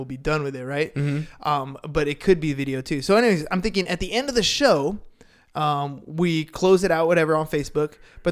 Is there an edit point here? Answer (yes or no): no